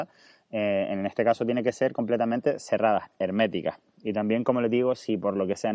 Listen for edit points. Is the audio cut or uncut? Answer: cut